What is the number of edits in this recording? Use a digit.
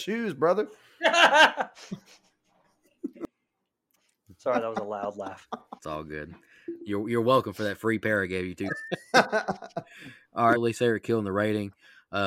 3